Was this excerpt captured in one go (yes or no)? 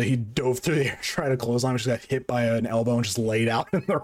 yes